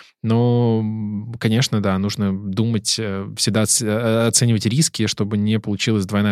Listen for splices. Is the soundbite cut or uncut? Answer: uncut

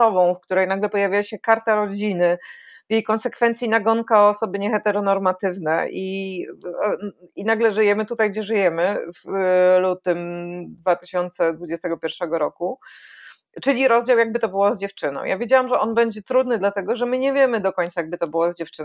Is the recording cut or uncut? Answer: uncut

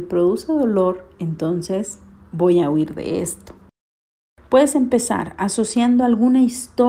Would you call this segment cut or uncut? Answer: uncut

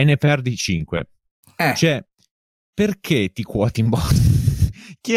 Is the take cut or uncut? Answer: uncut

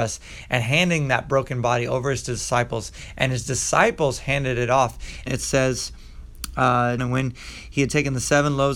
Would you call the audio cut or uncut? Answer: cut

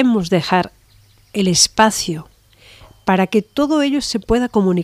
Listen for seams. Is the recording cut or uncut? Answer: uncut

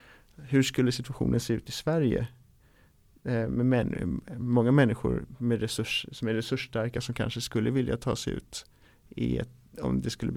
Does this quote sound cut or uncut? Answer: uncut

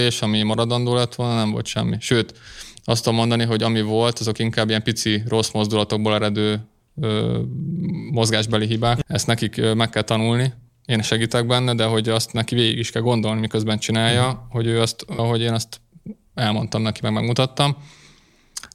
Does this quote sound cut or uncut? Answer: cut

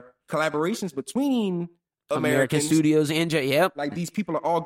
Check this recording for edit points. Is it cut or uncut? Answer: uncut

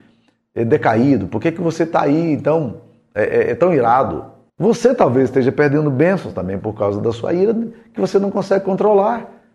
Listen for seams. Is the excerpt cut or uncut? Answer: cut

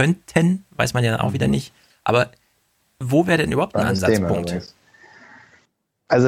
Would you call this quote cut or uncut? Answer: cut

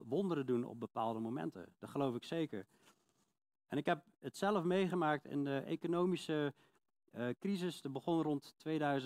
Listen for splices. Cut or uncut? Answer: uncut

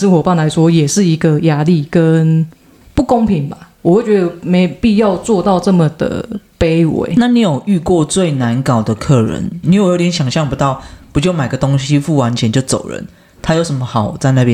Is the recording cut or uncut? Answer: cut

